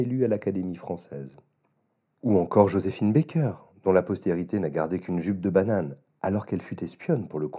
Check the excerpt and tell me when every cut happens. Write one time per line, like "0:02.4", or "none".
none